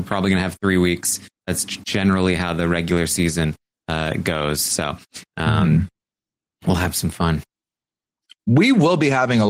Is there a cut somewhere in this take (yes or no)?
no